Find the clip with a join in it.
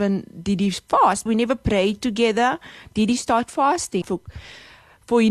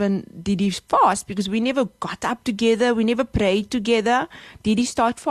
first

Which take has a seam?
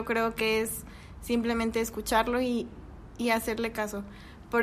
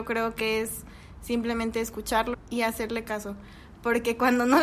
second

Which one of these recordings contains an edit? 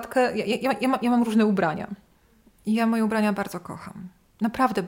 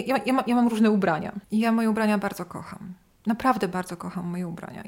second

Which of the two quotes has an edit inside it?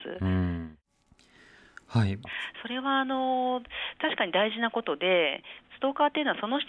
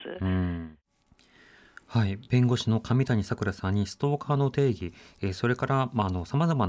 first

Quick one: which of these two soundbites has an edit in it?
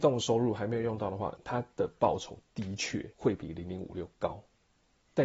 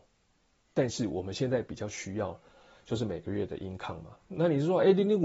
first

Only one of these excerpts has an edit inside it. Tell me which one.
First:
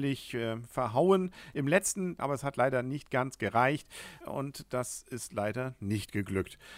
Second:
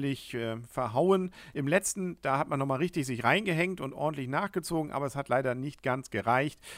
first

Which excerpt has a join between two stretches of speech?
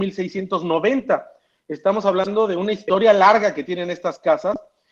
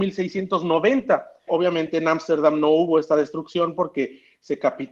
second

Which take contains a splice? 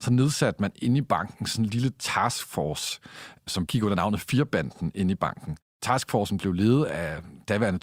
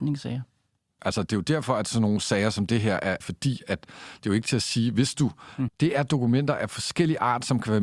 second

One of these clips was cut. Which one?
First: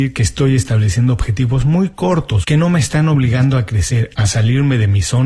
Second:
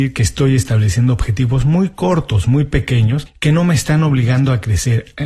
first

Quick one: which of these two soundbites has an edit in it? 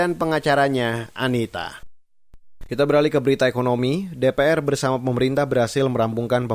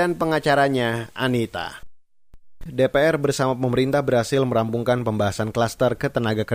second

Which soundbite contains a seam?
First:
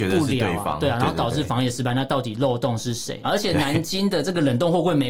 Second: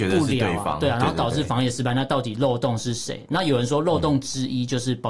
first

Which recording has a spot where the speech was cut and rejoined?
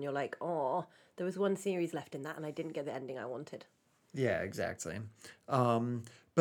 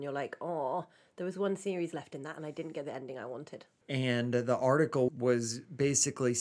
second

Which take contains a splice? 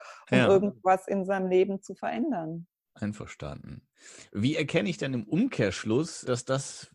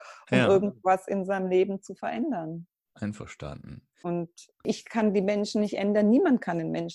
second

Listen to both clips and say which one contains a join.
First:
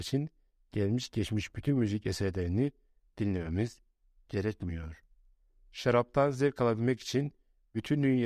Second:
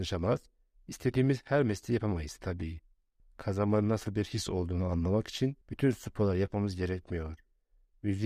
second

